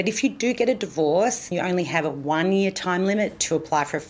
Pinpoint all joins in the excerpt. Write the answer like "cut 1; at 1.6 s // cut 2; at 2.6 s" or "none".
cut 1; at 1.5 s